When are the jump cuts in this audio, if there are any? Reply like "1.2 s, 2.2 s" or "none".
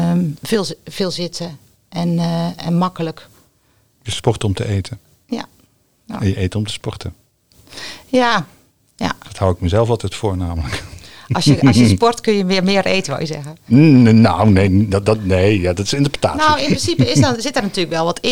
none